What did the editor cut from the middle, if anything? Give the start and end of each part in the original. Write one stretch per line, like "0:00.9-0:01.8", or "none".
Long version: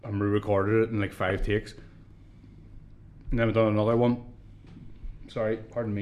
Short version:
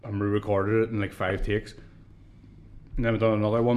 0:02.9-0:03.2

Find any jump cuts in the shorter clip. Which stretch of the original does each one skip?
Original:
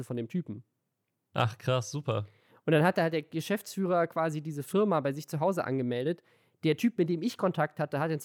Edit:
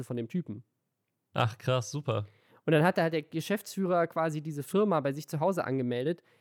none

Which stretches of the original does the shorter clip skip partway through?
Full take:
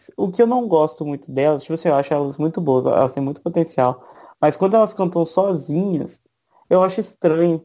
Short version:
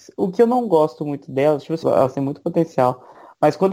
0:01.8-0:02.8

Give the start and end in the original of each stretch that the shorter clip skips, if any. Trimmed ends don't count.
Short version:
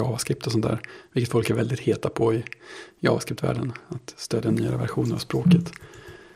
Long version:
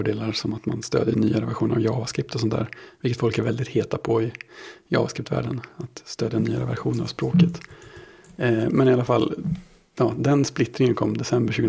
none

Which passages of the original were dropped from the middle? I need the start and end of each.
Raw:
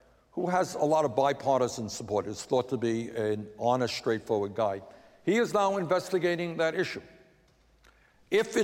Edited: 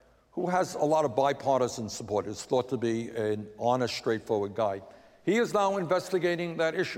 none

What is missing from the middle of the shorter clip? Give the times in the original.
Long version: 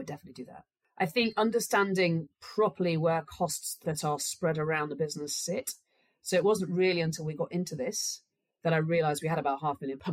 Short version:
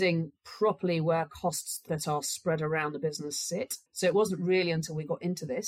0:05.8-0:06.2

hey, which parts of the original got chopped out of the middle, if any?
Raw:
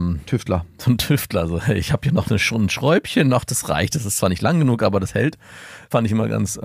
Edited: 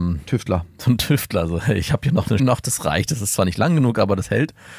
0:02.4-0:03.2

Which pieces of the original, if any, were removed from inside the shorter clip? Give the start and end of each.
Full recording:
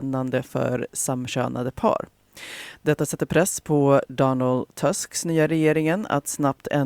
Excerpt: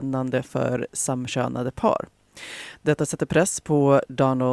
none

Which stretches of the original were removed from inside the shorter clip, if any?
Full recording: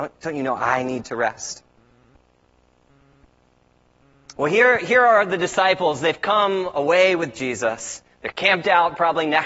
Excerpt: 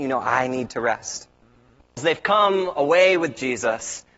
0:02.3-0:06.0

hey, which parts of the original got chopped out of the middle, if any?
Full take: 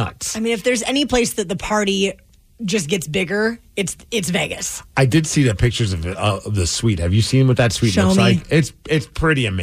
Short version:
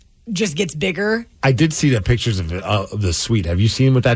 0:03.7-0:04.9

